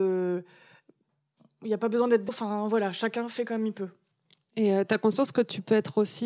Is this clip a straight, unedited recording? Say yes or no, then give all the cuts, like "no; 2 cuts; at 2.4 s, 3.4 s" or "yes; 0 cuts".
no; 1 cut; at 2.3 s